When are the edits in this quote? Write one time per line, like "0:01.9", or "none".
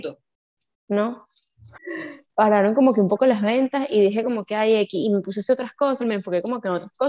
0:01.8
0:06.0